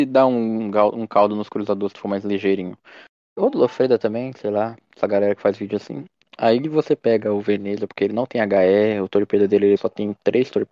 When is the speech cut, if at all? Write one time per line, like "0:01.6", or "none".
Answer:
0:03.4
0:09.8